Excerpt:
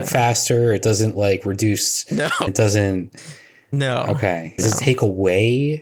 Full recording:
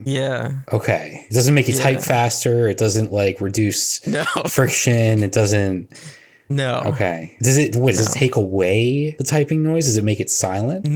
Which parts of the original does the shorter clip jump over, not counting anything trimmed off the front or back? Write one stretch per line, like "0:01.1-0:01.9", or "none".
0:04.4-0:05.2
0:07.4-0:07.9